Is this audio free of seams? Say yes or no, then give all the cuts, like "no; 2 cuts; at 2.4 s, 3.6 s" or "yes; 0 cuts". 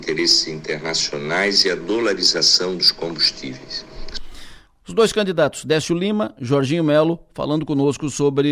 yes; 0 cuts